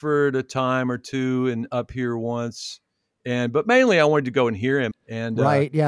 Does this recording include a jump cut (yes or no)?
yes